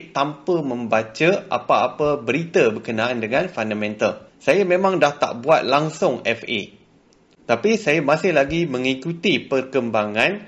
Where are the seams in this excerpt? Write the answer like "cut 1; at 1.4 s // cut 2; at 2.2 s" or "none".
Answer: cut 1; at 4.3 s